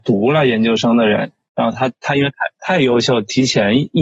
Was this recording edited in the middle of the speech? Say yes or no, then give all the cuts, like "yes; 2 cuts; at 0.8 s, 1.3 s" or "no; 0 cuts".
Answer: no; 0 cuts